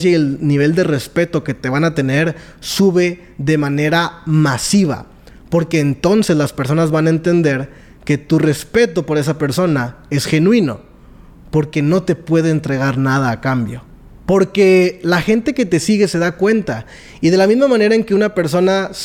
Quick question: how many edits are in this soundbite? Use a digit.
1